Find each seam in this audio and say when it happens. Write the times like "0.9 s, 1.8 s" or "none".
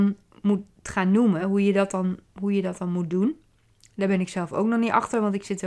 none